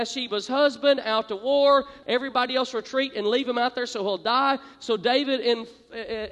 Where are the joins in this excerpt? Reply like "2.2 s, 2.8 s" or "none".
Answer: 2.0 s